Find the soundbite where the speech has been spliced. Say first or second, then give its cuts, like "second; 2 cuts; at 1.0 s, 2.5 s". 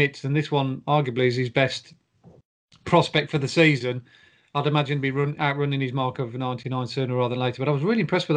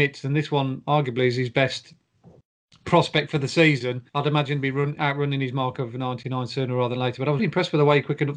second; 2 cuts; at 4.1 s, 7.4 s